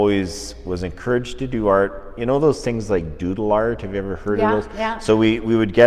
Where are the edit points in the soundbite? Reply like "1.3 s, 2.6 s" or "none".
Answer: none